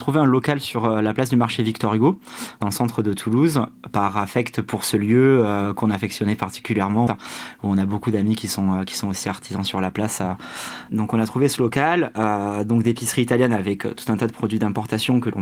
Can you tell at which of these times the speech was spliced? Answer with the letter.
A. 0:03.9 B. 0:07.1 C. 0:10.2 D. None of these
B